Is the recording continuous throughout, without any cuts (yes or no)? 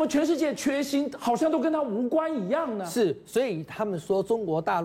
yes